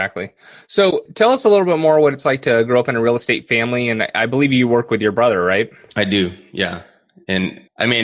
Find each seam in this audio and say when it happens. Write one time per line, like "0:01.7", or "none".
none